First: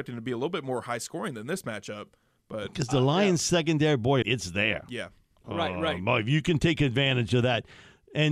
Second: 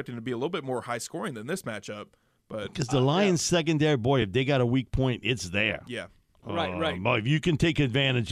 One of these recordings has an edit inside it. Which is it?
first; 1 cut; at 4.2 s

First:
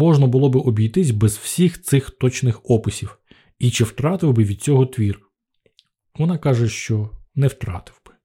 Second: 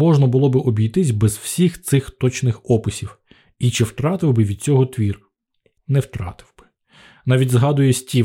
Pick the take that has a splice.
second; 1 cut; at 5.8 s

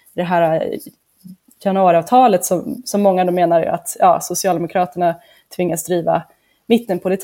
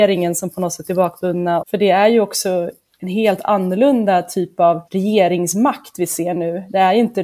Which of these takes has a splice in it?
second; 2 cuts; at 1.6 s, 4.9 s

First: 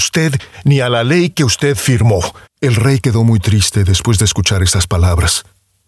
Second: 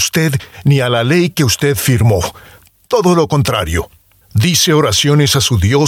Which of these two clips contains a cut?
first; 1 cut; at 2.4 s

